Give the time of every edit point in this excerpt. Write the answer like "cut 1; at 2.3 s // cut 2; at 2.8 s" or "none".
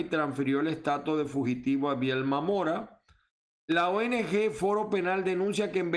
none

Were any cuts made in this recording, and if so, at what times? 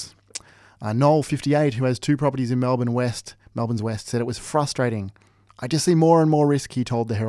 none

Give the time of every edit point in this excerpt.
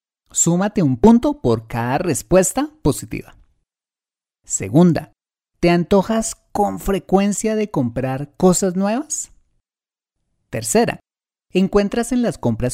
cut 1; at 4.4 s

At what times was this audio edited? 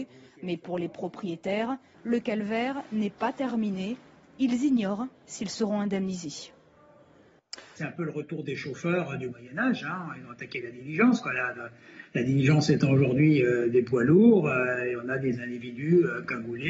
cut 1; at 1.9 s // cut 2; at 7.8 s

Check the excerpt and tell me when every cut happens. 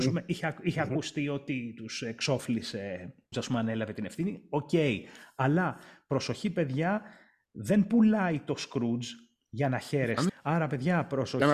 cut 1; at 3.3 s // cut 2; at 10.3 s

